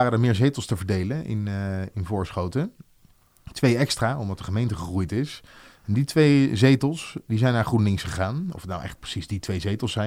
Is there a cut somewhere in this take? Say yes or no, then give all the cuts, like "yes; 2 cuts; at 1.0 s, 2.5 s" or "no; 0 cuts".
no; 0 cuts